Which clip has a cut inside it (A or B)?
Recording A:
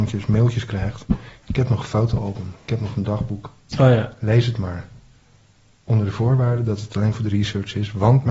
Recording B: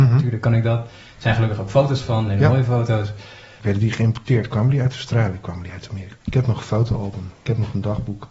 B